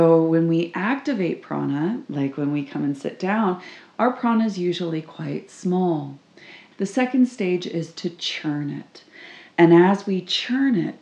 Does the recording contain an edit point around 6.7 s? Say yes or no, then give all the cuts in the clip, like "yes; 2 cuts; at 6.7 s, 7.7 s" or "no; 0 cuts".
yes; 1 cut; at 6.7 s